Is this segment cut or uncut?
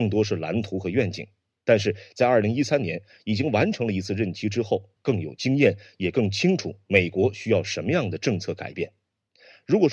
cut